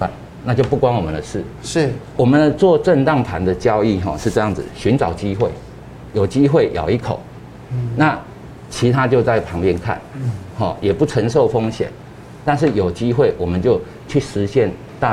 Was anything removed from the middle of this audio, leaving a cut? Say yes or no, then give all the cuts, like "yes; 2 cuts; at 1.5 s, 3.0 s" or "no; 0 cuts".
no; 0 cuts